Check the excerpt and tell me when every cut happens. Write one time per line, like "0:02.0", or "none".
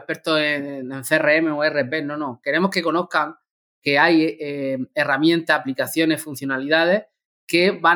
none